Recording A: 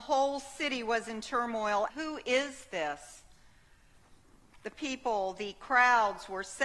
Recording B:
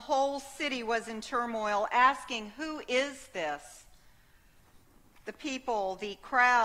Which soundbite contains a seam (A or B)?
A